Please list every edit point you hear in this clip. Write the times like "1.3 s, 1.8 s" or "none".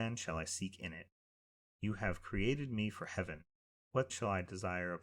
4.1 s